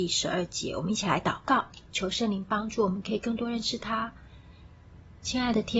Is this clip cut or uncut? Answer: uncut